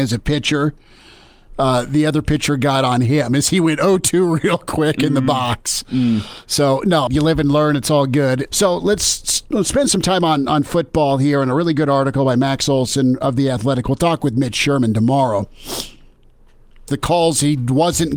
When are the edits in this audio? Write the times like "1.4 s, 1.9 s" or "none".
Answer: 7.1 s, 8.5 s, 16.9 s